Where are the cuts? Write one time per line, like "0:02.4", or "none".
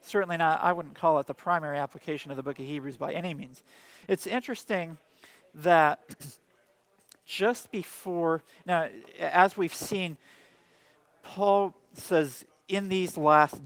none